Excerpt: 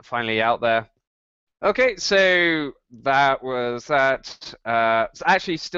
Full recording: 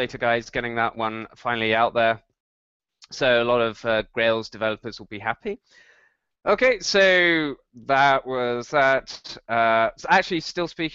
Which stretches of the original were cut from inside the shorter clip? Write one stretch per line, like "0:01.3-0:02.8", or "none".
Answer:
0:02.8-0:06.3